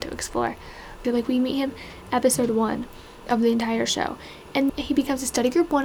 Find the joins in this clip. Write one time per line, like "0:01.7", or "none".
0:01.0
0:03.3
0:04.7